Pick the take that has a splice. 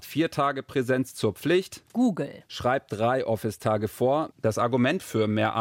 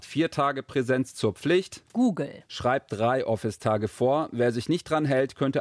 first; 1 cut; at 4.3 s

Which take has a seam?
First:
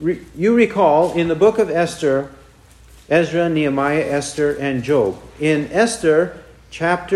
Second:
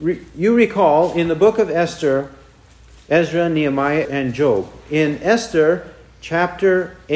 second; 1 cut; at 4.0 s

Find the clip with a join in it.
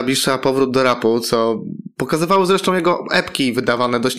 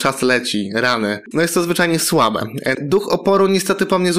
second; 2 cuts; at 1.3 s, 2.7 s

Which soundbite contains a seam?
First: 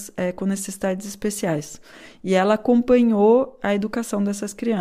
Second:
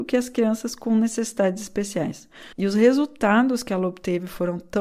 second; 1 cut; at 2.5 s

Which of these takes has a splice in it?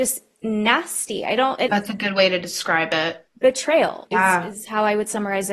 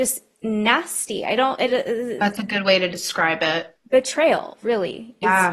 first; 2 cuts; at 1.7 s, 4.1 s

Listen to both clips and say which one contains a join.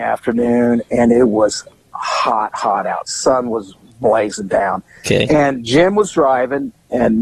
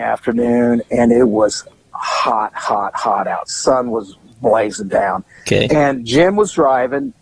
first; 1 cut; at 2.5 s

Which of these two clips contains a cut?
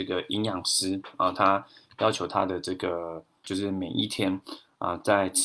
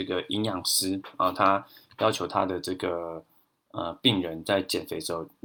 first; 1 cut; at 3.4 s

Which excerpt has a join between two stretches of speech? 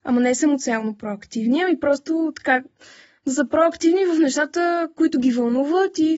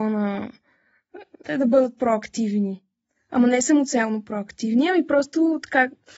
second; 1 cut; at 1.5 s

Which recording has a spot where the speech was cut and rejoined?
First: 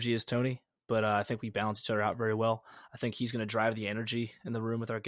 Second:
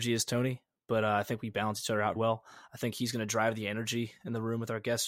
second; 1 cut; at 2.2 s

